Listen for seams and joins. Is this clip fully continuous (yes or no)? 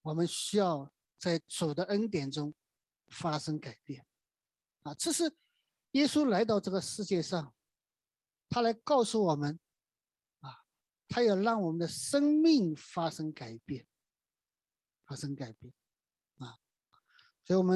yes